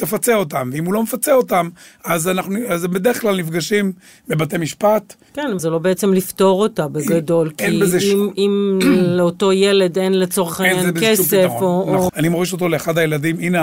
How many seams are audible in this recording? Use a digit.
2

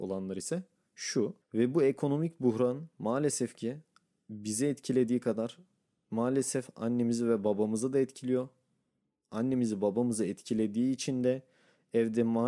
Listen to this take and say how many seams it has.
1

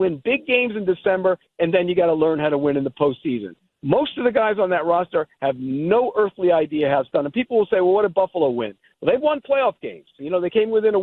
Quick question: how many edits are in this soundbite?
1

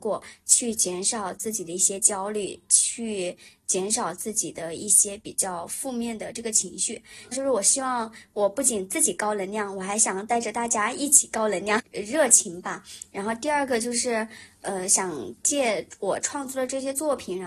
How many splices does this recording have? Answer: 2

